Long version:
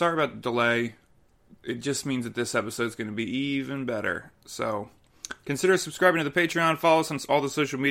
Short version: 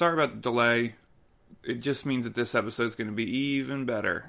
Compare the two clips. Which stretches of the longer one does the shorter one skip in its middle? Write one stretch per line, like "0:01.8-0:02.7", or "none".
none